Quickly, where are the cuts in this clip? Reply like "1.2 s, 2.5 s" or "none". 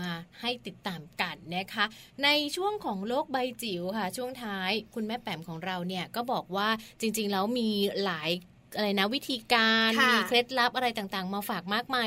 none

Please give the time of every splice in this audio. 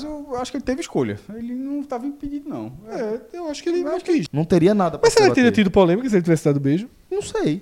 4.3 s

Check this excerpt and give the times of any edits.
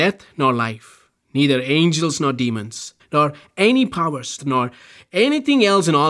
3.0 s, 4.4 s

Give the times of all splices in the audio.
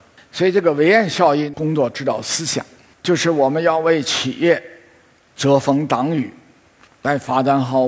6.9 s

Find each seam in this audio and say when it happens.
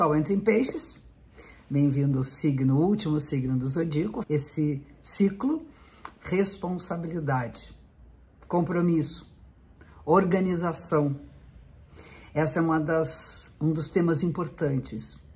4.2 s, 6.2 s

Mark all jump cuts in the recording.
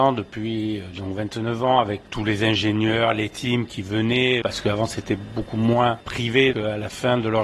2.0 s, 4.4 s, 6.5 s

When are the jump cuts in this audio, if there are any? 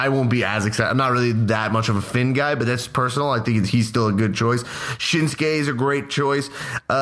none

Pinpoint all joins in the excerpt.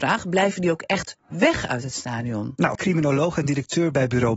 2.8 s

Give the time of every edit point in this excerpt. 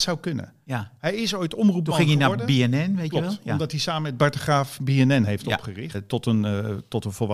5.9 s

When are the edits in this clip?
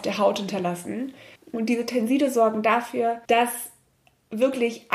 1.4 s, 3.2 s

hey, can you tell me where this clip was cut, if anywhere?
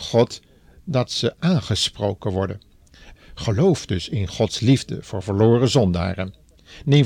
3.1 s

